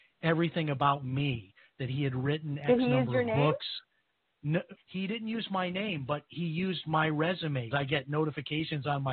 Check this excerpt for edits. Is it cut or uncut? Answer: cut